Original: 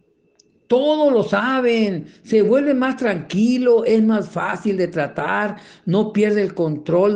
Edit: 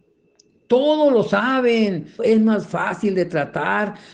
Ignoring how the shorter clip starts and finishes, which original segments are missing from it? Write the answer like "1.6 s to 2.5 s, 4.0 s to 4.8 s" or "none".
2.2 s to 3.8 s